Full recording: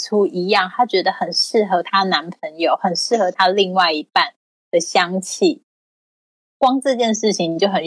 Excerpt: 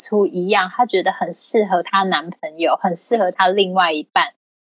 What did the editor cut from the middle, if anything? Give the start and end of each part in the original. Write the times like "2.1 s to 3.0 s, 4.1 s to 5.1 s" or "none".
none

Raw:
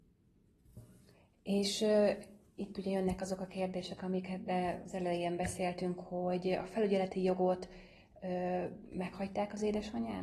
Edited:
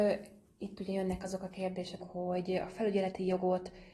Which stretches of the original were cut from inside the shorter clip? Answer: 4.0 s to 5.9 s

